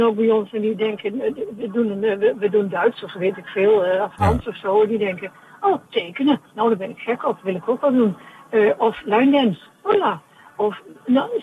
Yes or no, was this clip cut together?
no